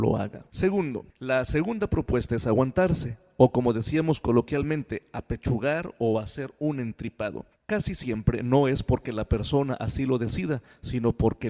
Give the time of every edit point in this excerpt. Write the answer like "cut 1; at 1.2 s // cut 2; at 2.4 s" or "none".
none